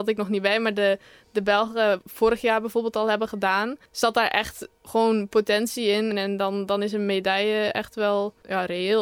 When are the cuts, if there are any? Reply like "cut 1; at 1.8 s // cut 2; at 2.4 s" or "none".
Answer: cut 1; at 3.9 s // cut 2; at 6.1 s

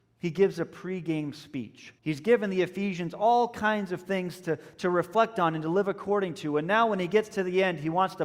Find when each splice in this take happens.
cut 1; at 2.0 s

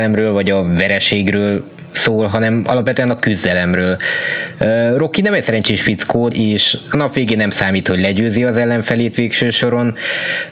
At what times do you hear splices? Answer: cut 1; at 4.6 s // cut 2; at 6.3 s

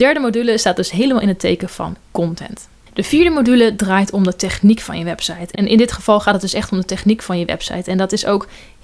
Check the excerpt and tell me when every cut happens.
cut 1; at 5.5 s

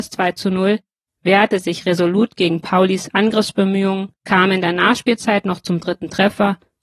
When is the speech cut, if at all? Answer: cut 1; at 1.1 s // cut 2; at 4.2 s

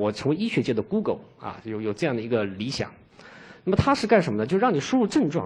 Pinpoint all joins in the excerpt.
none

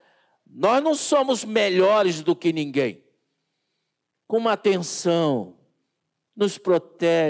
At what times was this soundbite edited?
cut 1; at 4.1 s

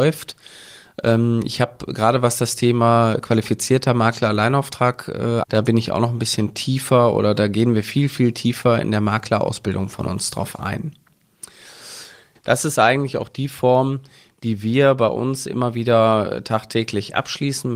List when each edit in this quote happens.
cut 1; at 5.4 s // cut 2; at 12.4 s

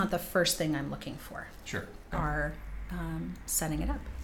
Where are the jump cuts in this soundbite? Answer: cut 1; at 2.1 s

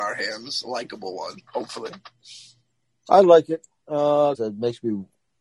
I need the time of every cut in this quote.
cut 1; at 1.5 s // cut 2; at 4.3 s

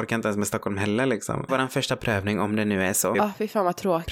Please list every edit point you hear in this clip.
cut 1; at 1.5 s // cut 2; at 3.1 s

